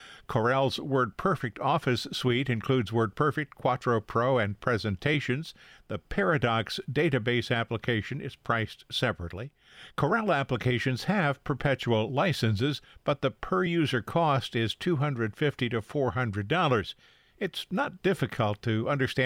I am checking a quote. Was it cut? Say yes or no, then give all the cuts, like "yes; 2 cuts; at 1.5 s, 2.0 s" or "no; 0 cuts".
no; 0 cuts